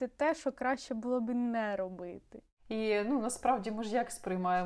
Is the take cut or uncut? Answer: uncut